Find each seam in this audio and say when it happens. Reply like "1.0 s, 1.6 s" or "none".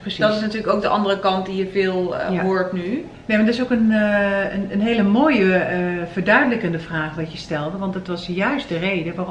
none

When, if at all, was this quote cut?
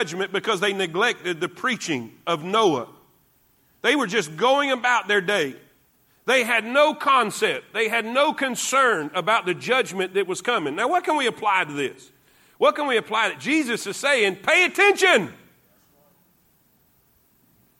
none

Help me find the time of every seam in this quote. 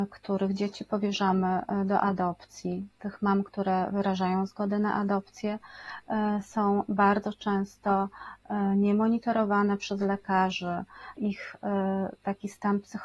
11.2 s

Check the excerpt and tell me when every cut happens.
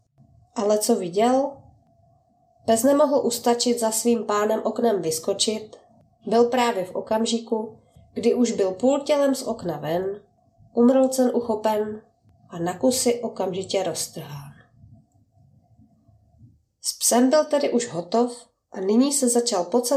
none

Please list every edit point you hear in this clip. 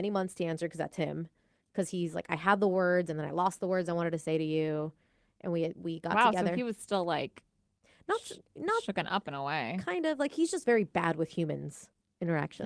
none

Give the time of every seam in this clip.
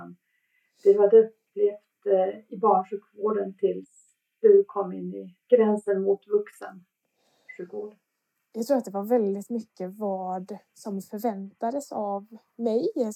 5.4 s

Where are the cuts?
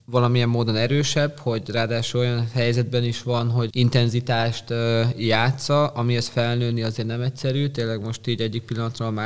3.7 s

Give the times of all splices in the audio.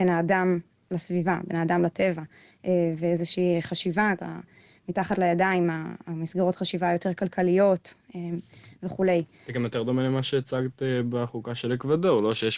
4.2 s

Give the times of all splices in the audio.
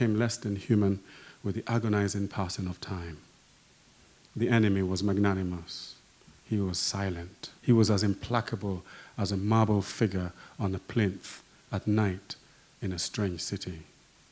4.2 s, 7.6 s

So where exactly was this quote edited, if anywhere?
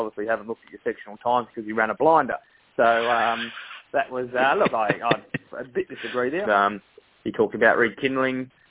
6.4 s

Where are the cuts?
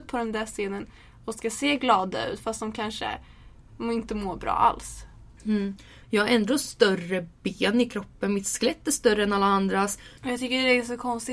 6.0 s, 10.2 s

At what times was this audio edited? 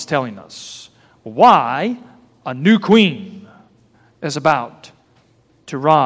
none

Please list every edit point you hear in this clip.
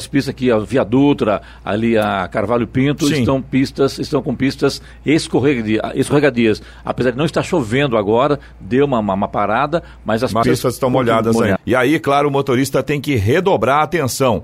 10.4 s, 11.6 s

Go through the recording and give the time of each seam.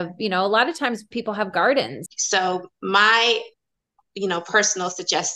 2.1 s

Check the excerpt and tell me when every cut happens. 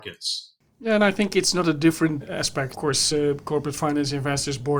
none

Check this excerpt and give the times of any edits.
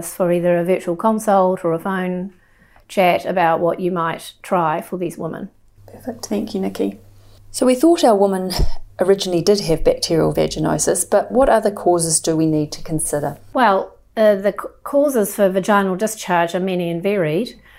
none

